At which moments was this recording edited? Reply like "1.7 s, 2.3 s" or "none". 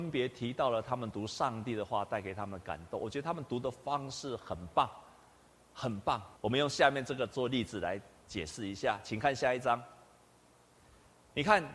6.4 s